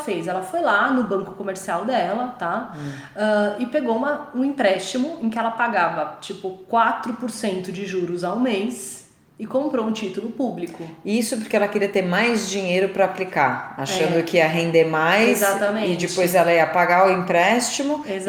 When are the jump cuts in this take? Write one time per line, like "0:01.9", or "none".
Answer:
none